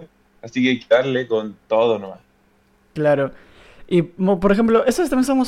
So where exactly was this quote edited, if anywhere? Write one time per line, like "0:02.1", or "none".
none